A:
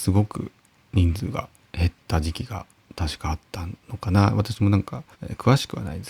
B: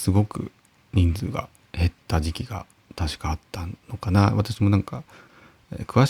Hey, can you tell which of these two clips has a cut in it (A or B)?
A